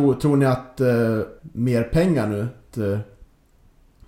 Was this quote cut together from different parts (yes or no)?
yes